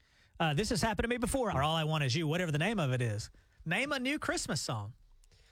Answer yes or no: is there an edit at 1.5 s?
yes